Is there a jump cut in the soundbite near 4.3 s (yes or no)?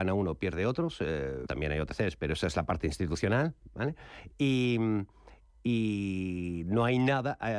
no